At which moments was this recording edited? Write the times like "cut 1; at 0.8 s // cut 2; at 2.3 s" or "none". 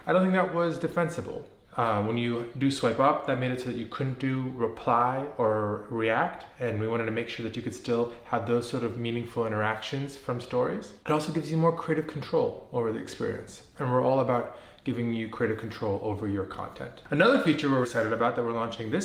cut 1; at 1.6 s // cut 2; at 17.8 s